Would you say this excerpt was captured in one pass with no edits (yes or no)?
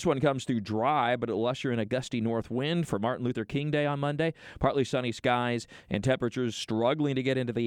yes